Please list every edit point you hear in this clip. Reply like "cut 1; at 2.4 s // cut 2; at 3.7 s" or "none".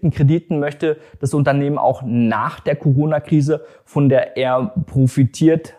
none